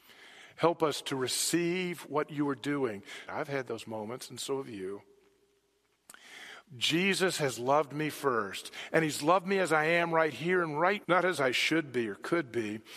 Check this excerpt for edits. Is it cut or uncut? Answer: cut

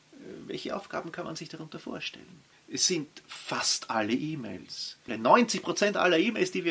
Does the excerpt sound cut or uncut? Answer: cut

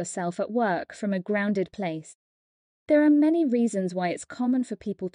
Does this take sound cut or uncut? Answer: cut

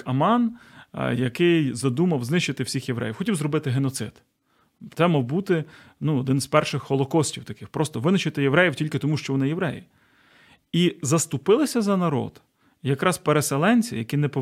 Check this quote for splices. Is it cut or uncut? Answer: uncut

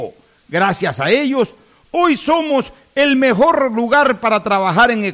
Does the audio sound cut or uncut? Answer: uncut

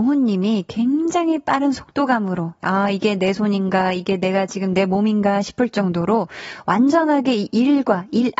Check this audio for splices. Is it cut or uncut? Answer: cut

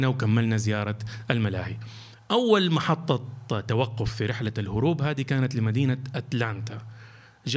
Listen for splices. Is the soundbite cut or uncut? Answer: uncut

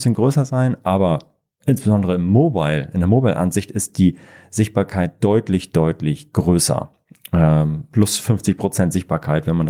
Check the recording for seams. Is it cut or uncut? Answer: cut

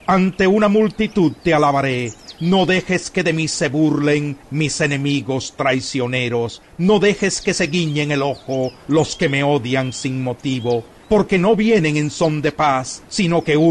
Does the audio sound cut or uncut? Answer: uncut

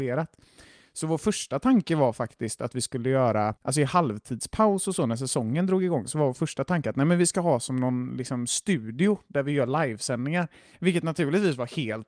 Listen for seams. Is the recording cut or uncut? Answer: cut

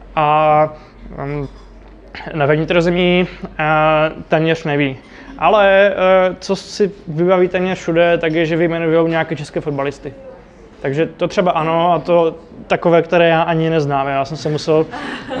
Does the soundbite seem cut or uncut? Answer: uncut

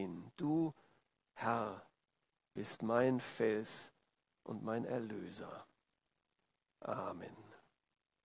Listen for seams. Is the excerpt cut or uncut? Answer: uncut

